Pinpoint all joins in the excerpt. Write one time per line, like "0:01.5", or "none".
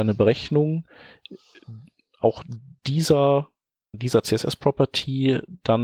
0:03.9